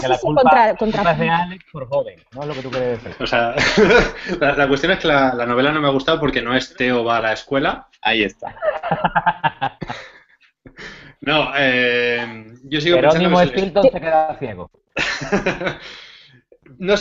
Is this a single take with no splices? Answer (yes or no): yes